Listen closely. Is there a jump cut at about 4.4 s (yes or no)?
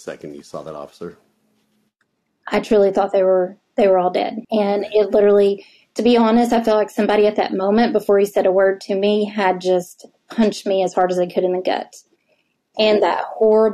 yes